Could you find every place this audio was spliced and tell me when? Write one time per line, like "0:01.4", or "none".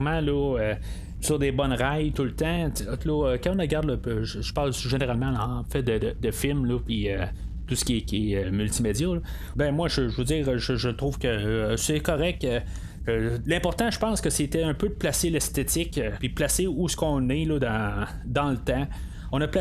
0:03.0
0:08.4
0:09.5